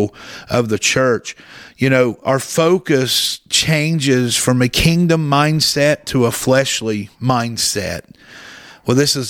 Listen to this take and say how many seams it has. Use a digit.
0